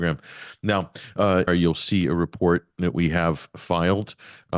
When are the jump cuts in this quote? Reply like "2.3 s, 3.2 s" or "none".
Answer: 1.5 s